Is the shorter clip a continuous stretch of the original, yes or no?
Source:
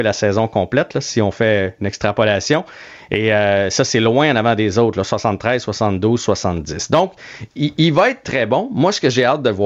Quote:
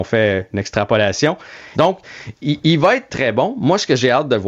no